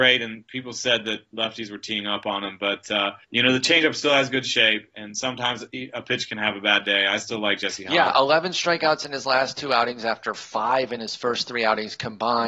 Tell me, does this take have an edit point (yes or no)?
yes